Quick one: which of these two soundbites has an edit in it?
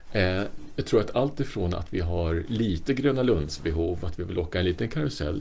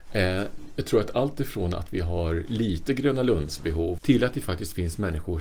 second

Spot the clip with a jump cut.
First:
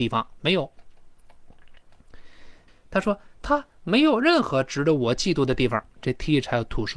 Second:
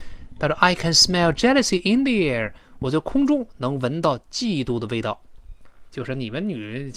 first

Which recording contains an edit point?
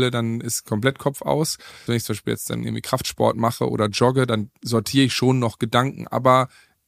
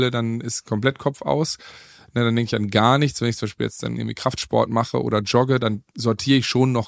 first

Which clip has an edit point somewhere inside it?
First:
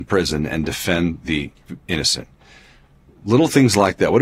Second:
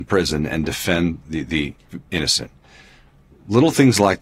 first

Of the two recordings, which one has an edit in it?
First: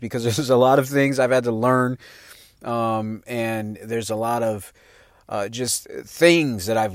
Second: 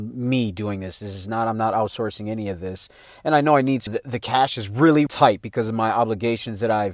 second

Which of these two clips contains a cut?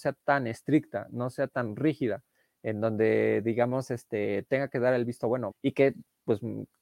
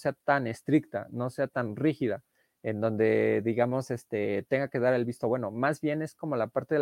first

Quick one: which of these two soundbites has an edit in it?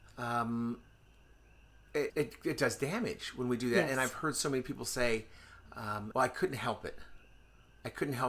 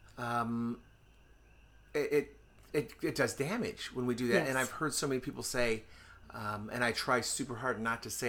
first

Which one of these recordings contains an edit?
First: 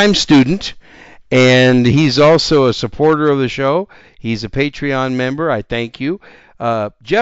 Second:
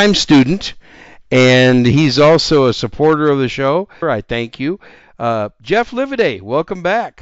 second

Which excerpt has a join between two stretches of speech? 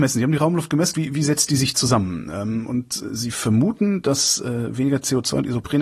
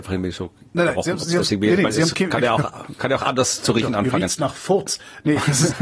first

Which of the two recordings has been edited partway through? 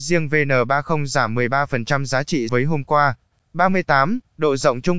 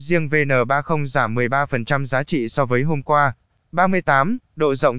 first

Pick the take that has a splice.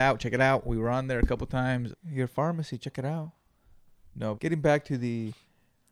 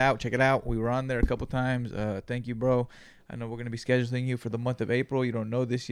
first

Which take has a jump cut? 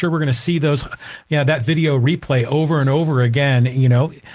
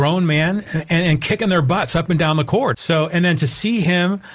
second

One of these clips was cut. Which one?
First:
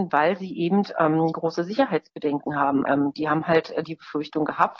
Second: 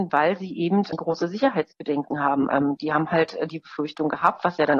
second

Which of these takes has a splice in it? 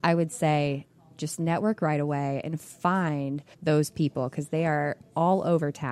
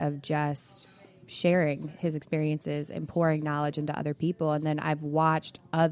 first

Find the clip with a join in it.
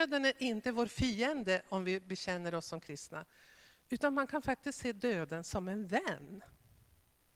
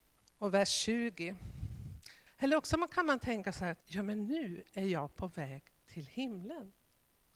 second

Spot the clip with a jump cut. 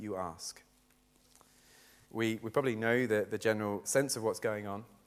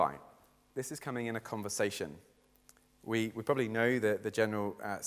first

